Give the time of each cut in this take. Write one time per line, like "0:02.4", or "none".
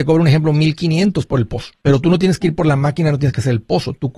0:01.8

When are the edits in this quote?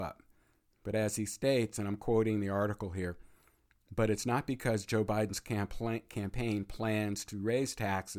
none

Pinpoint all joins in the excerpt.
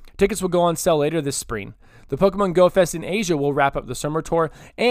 none

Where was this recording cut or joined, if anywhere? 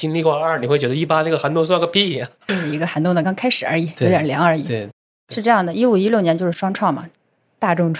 0:03.2

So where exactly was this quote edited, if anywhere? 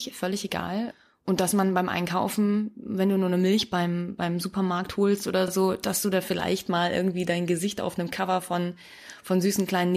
none

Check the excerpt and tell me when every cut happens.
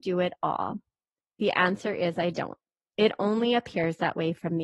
none

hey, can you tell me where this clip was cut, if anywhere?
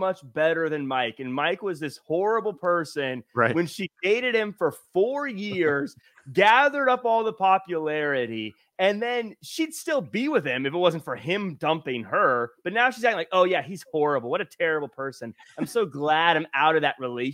none

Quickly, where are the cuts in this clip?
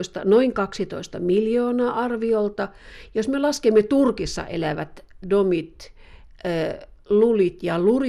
0:05.2

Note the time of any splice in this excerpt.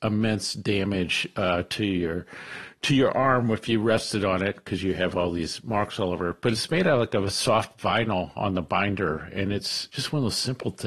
0:09.9

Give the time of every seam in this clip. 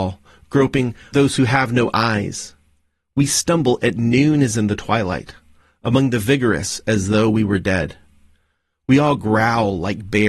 0:01.1

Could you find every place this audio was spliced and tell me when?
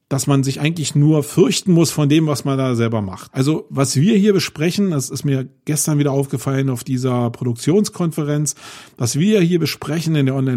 0:03.3

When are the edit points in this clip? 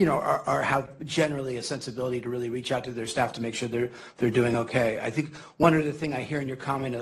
none

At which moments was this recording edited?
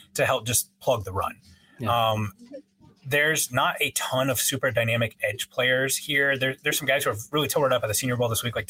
none

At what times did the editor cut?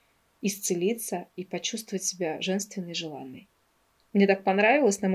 0:04.0

